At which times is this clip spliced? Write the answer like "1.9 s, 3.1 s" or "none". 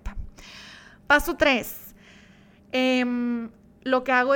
none